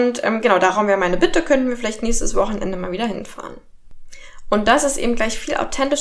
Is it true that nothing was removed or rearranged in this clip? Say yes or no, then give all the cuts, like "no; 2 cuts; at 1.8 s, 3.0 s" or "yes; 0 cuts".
yes; 0 cuts